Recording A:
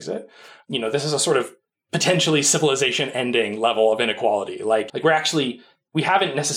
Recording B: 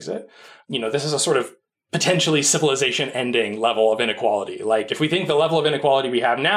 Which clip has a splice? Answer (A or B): A